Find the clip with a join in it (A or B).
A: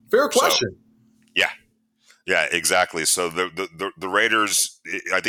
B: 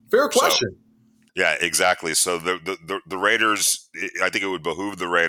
B